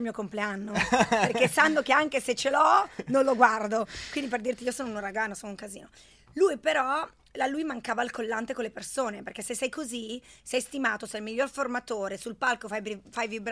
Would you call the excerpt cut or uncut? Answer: uncut